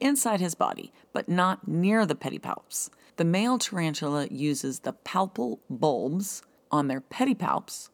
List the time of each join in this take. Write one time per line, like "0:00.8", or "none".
0:03.1
0:06.6